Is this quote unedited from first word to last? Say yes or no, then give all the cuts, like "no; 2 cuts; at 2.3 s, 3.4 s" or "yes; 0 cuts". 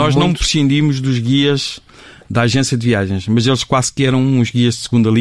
yes; 0 cuts